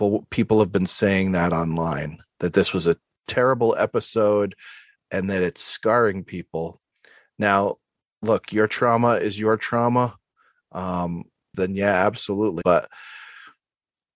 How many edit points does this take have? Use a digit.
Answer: 2